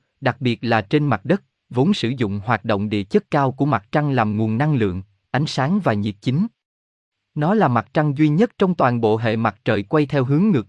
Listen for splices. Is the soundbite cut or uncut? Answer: uncut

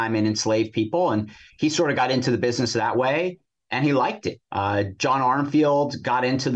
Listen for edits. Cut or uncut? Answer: cut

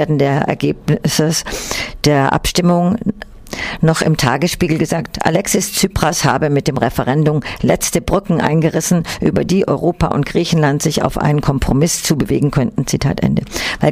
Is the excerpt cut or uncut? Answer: uncut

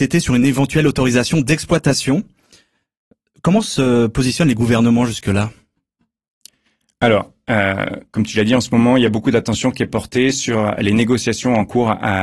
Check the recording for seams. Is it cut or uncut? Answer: uncut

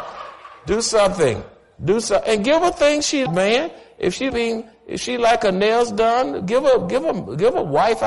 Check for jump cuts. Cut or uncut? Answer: cut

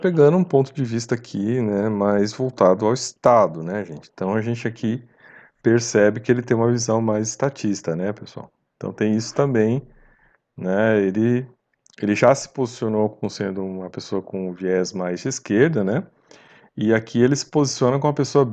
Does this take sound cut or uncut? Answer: uncut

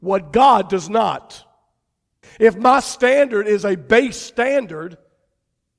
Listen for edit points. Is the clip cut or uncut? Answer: cut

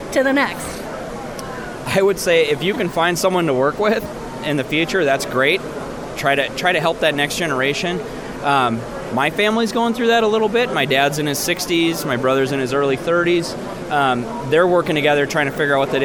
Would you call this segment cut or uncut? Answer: uncut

